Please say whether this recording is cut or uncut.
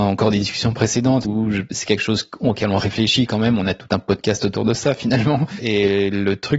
cut